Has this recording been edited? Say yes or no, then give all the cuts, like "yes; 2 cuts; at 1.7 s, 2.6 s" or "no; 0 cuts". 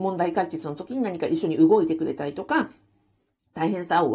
no; 0 cuts